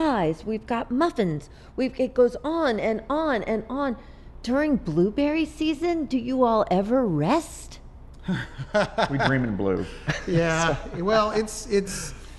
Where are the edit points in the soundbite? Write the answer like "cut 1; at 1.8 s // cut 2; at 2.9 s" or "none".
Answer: none